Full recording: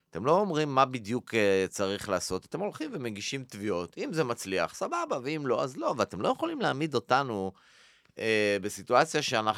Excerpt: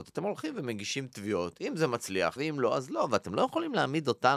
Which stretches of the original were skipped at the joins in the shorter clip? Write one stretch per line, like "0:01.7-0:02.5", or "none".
0:04.7-0:05.2